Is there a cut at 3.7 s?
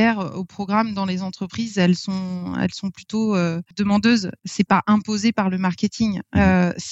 yes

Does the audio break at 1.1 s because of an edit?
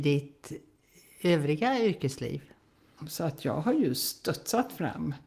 no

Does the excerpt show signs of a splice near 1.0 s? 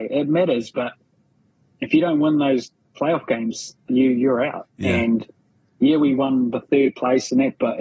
no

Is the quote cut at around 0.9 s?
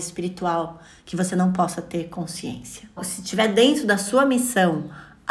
no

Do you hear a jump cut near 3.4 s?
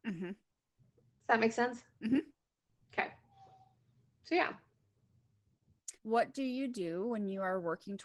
no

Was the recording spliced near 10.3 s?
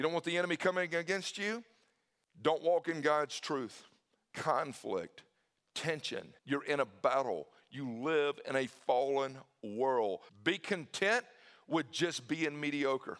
yes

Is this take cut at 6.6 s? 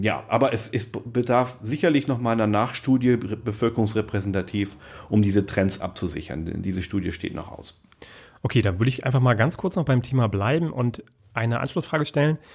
no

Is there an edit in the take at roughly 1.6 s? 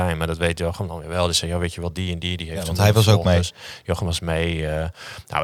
no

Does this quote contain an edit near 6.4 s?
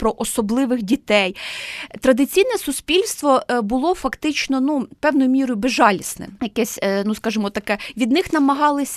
yes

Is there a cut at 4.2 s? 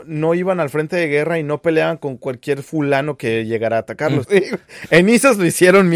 yes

